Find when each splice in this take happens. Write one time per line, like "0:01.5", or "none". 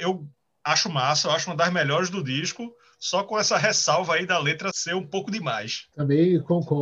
0:04.7